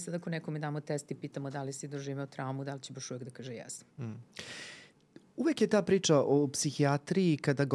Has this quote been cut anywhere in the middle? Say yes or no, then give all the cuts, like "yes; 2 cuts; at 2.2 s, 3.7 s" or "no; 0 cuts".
no; 0 cuts